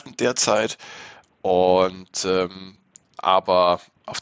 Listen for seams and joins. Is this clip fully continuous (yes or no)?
no